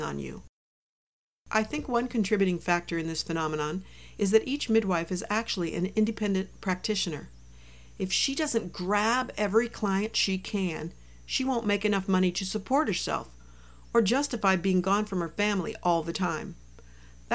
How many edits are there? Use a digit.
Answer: 0